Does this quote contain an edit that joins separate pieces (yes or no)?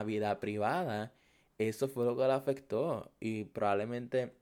no